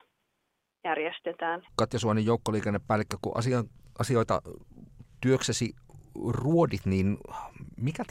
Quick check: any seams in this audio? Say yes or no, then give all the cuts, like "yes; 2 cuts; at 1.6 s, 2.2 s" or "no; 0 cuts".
yes; 1 cut; at 1.7 s